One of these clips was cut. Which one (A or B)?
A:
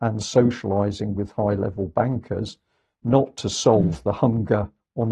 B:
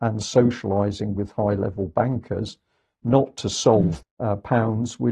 B